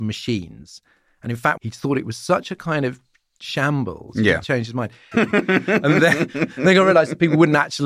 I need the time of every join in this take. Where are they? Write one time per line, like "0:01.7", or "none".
0:01.6
0:05.1